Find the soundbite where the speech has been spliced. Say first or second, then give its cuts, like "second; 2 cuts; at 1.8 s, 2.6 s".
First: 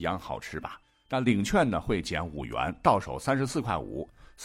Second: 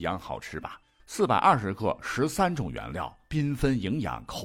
second; 1 cut; at 1.0 s